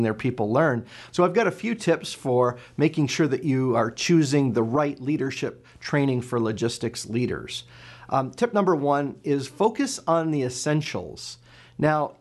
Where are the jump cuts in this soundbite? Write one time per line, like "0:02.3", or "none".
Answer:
0:01.1